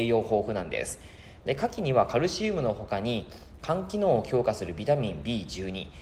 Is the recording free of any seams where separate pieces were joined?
no; 1 cut; at 1.4 s

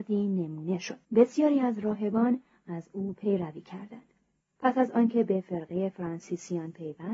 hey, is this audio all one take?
no; 2 cuts; at 1.0 s, 4.4 s

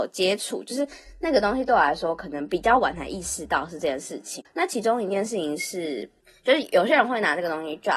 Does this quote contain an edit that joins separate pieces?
yes; 1 cut; at 4.4 s

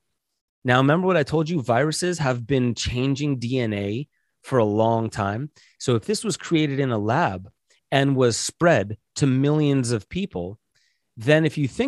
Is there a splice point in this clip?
no; 0 cuts

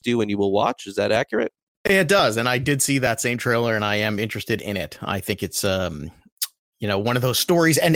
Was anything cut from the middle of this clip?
no; 0 cuts

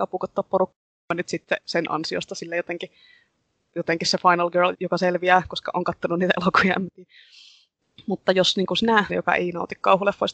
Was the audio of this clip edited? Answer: yes; 2 cuts; at 4.7 s, 9.1 s

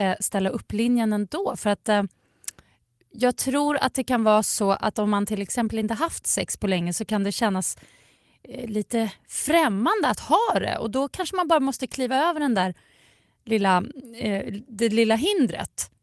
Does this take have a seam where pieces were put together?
no; 0 cuts

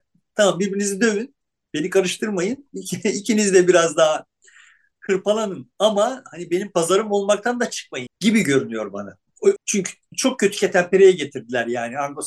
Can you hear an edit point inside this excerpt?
yes; 2 cuts; at 8.1 s, 9.6 s

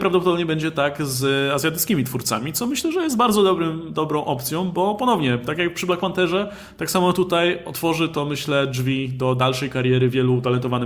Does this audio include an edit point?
no; 0 cuts

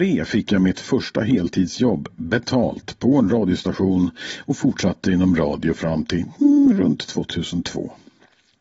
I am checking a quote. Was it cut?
no; 0 cuts

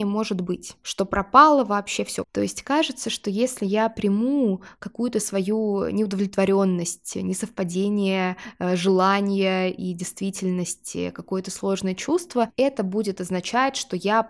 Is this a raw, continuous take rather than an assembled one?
no; 1 cut; at 2.2 s

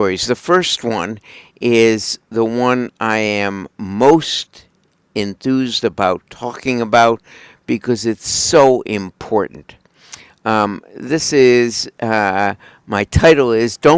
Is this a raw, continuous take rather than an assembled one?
yes; 0 cuts

